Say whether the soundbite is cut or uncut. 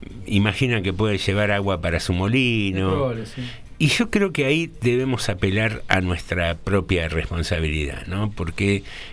cut